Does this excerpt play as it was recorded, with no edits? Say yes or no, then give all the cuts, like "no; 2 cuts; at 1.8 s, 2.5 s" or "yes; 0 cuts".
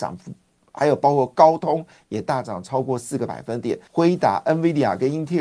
no; 1 cut; at 3.9 s